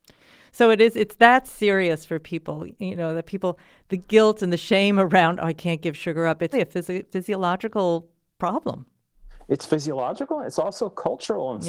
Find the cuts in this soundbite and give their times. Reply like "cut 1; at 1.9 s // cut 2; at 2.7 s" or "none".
cut 1; at 6.5 s